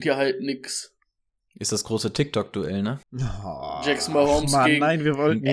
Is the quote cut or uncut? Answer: cut